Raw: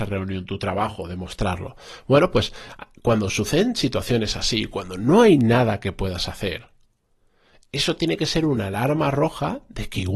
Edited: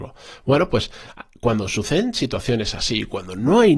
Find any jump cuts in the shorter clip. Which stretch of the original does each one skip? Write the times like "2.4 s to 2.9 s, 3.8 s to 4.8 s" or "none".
none

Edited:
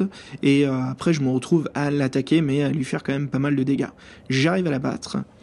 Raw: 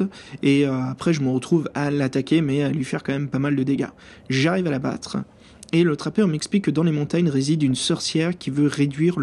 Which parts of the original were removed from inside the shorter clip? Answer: none

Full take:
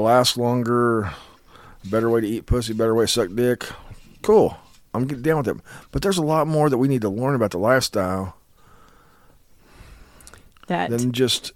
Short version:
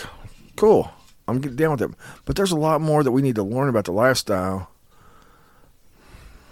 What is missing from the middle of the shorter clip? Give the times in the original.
none

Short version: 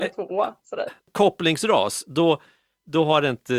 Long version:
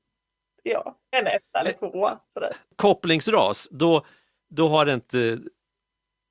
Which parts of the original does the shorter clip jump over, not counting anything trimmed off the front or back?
none

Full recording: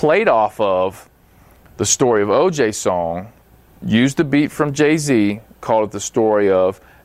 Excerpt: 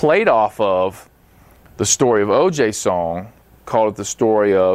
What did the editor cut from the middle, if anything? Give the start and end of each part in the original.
3.6 s to 5.5 s

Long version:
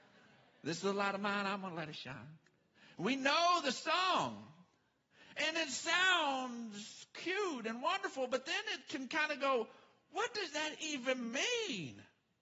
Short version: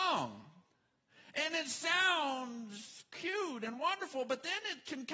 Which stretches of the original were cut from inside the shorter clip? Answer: none

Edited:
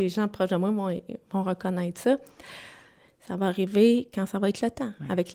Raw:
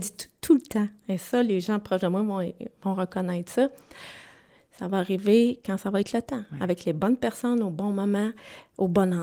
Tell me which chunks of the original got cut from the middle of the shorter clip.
none

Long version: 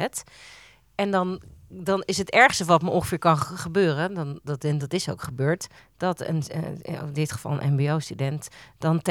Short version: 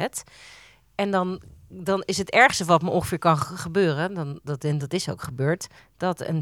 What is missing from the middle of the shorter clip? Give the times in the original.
none

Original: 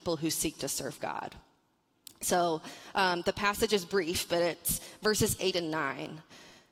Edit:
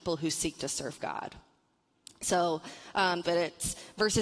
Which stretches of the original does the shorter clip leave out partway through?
3.2 s to 4.3 s

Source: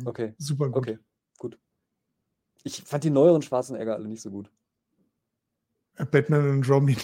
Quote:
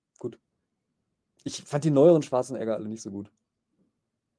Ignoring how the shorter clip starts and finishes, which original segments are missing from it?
none

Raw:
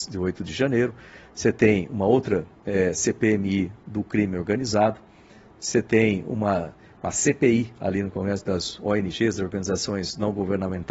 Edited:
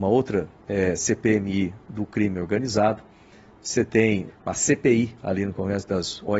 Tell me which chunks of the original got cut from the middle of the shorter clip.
6.2 s to 6.8 s

